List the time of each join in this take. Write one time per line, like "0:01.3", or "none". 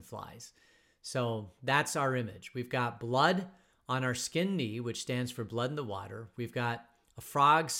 none